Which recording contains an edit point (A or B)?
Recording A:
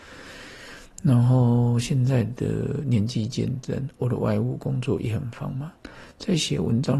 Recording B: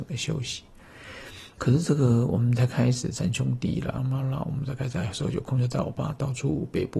B